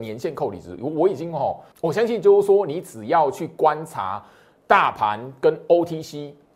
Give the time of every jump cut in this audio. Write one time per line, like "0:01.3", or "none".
0:01.7